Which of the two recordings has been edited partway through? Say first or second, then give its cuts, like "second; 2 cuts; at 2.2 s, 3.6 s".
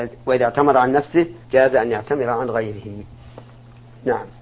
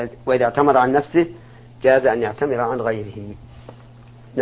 first; 1 cut; at 1.4 s